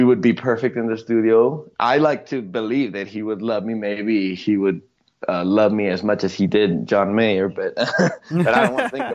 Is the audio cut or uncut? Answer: uncut